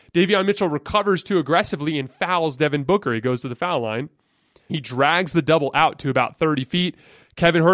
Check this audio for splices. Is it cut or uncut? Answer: cut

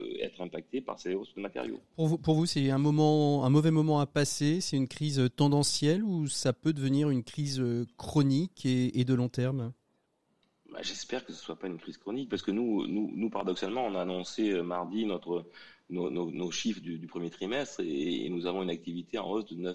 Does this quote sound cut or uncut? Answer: uncut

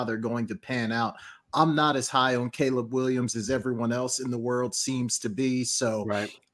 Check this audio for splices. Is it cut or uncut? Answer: uncut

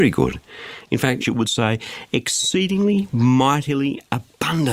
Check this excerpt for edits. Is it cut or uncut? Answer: cut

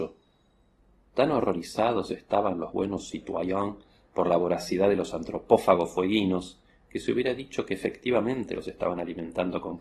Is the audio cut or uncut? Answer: uncut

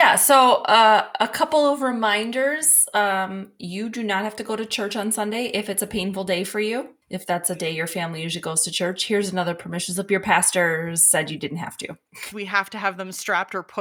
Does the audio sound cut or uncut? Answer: cut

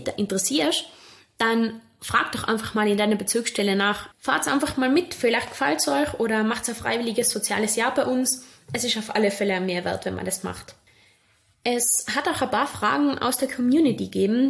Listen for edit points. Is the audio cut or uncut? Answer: cut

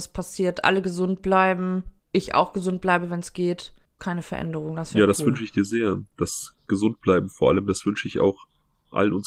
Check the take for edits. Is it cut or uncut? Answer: cut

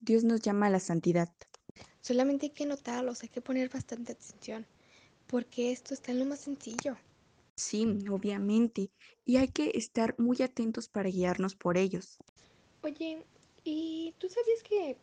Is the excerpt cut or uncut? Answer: cut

